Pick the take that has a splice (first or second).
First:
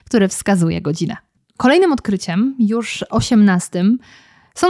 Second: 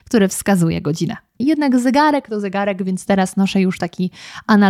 second